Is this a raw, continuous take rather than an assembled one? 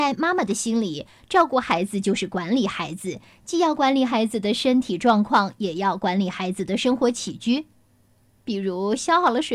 yes; 0 cuts

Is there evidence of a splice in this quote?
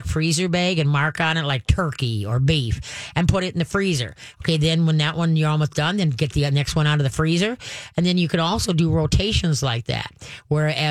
yes; 1 cut; at 4.3 s

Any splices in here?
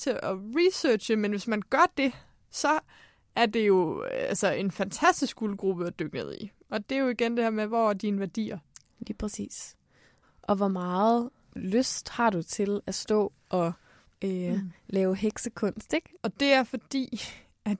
yes; 1 cut; at 16.2 s

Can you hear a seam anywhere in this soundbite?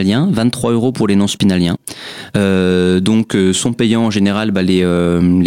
no; 0 cuts

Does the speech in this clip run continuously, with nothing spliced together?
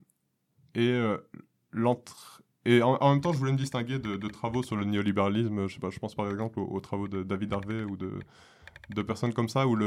no; 1 cut; at 2.5 s

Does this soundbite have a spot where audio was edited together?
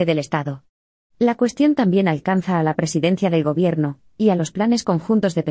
yes; 1 cut; at 1.0 s

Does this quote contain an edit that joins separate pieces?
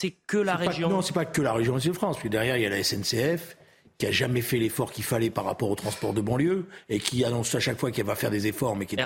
no; 0 cuts

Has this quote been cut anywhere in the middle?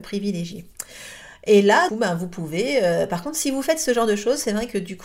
yes; 1 cut; at 1.9 s

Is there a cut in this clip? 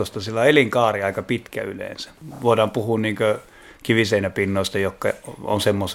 no; 0 cuts

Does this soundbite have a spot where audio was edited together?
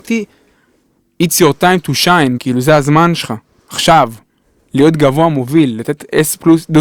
yes; 1 cut; at 2.4 s

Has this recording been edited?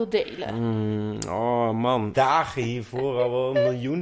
yes; 1 cut; at 2.1 s

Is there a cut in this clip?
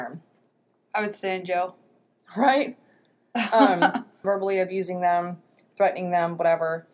yes; 1 cut; at 4.2 s

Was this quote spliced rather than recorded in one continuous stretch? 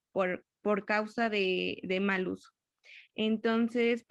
no; 0 cuts

